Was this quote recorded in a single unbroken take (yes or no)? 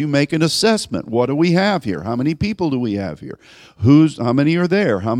yes